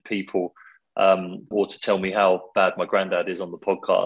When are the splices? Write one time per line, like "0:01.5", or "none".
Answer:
0:01.5